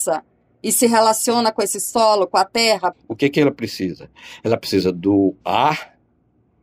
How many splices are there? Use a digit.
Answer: 1